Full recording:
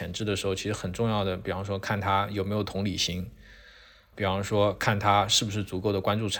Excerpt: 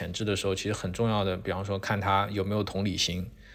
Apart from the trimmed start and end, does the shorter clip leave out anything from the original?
no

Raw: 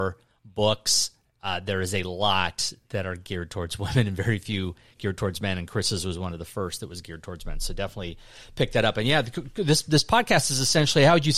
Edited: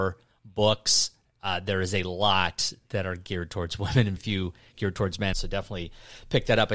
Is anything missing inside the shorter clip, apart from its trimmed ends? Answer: yes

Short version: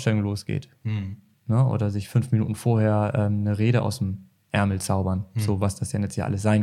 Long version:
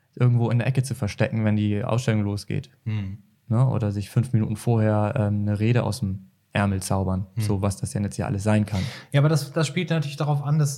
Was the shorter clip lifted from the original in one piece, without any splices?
yes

